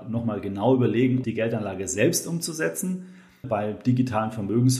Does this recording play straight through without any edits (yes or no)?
no